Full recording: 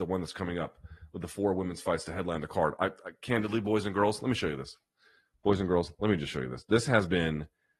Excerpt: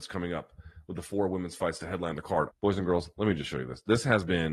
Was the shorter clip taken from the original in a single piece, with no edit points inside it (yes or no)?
no